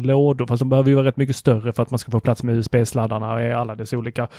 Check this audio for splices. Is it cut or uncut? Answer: uncut